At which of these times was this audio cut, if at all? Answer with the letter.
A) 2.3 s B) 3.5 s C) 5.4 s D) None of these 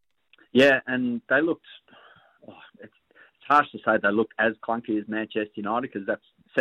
D